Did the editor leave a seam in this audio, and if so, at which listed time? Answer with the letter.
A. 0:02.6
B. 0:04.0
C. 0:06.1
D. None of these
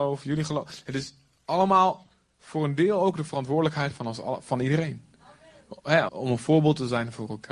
C